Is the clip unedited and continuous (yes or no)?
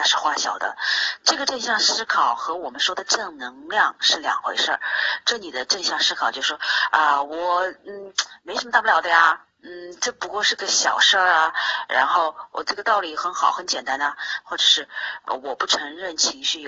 yes